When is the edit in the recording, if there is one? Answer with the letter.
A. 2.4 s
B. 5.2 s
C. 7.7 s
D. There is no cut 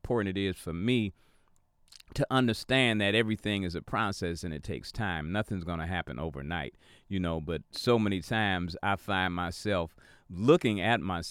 D